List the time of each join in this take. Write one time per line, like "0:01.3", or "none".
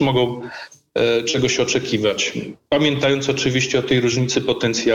none

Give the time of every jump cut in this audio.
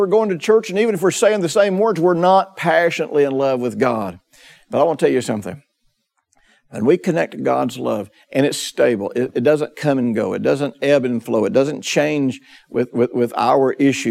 none

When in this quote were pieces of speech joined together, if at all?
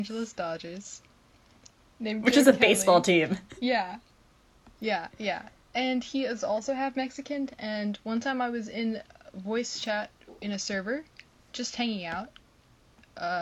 none

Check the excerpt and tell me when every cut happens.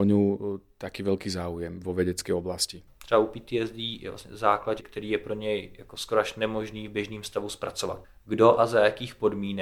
0:04.8
0:08.2

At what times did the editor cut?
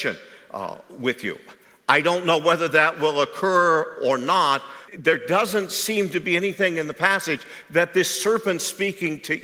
0:04.9

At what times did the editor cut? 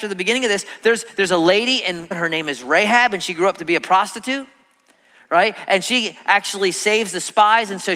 0:02.1

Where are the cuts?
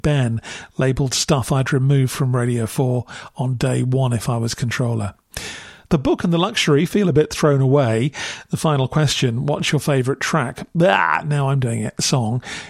none

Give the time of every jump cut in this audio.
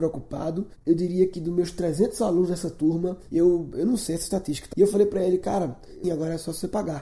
0:04.7
0:06.0

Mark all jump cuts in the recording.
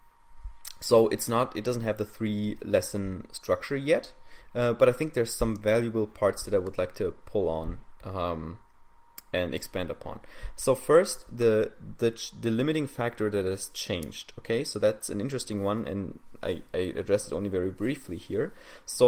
none

